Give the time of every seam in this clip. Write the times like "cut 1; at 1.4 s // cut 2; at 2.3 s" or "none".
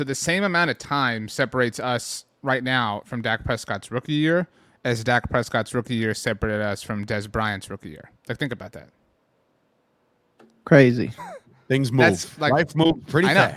cut 1; at 8.2 s // cut 2; at 11.2 s